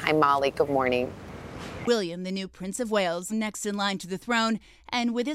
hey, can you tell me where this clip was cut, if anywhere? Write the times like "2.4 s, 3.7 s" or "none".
1.8 s, 3.3 s